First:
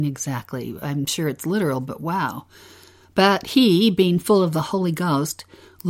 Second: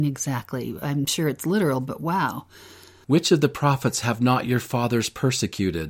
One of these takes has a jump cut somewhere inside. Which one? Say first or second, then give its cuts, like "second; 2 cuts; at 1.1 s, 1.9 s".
second; 1 cut; at 3.0 s